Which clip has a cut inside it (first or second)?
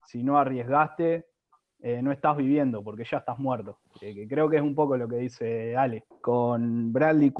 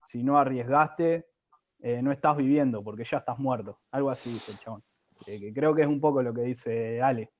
first